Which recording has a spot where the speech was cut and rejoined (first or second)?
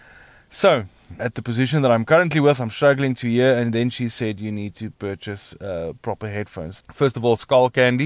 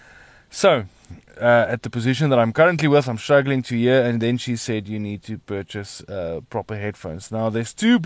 first